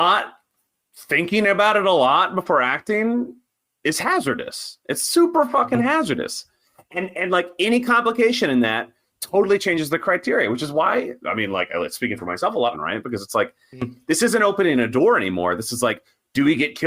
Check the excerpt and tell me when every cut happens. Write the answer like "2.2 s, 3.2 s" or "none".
12.7 s